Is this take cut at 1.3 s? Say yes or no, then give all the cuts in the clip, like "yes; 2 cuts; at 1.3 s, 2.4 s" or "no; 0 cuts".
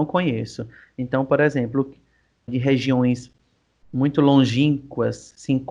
no; 1 cut; at 2.5 s